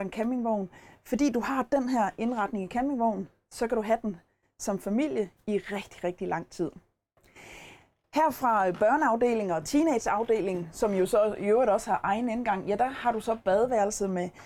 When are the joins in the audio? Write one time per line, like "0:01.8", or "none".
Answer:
none